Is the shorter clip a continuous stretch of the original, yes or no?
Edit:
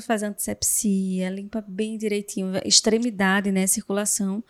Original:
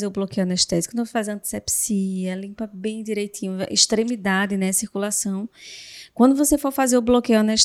yes